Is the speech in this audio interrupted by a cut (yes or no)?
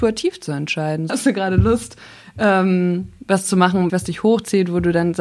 yes